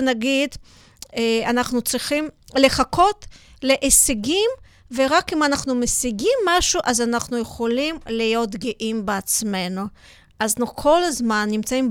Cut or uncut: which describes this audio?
uncut